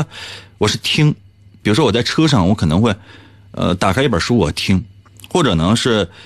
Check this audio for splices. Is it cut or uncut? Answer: uncut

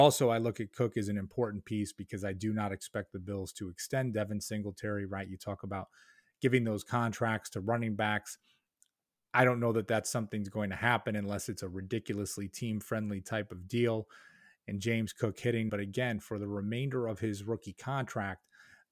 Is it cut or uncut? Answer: cut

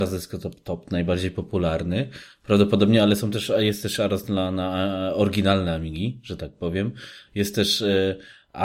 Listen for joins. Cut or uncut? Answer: uncut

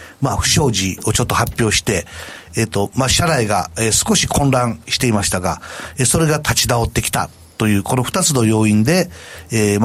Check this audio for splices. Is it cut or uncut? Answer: uncut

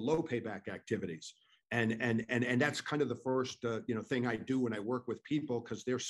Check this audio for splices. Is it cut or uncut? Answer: uncut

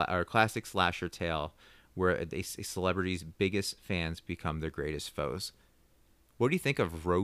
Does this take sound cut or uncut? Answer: uncut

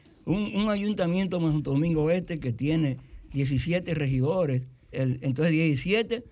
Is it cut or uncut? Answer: cut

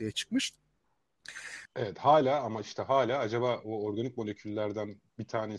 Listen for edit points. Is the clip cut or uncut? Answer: cut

